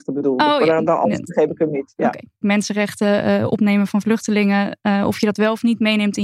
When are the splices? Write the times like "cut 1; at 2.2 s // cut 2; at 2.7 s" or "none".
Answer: cut 1; at 2.4 s